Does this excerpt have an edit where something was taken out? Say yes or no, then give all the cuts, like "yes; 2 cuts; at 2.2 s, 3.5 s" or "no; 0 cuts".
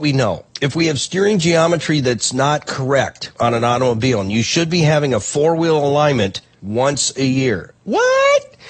yes; 1 cut; at 7.8 s